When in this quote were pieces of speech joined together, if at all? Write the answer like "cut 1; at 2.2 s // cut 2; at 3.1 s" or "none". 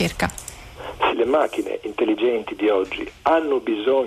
cut 1; at 1.1 s